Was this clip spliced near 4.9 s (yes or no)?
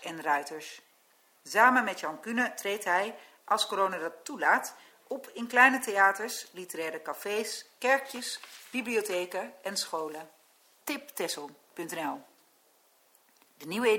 no